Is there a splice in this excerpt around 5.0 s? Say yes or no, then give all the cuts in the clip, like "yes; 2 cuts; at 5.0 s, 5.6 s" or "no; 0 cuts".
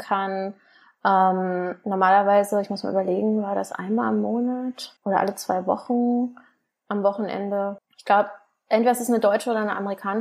yes; 2 cuts; at 5.0 s, 7.8 s